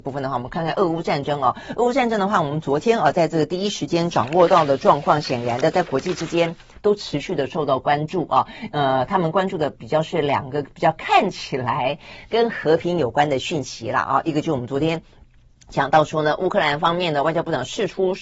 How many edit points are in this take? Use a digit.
0